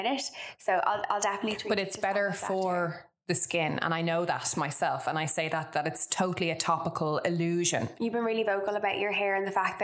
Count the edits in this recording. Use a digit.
1